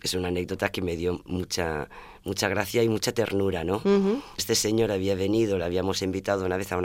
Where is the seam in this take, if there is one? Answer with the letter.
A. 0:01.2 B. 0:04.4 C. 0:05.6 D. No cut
B